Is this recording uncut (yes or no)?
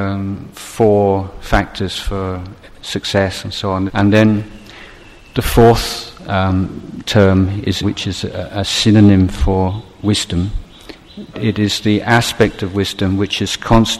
no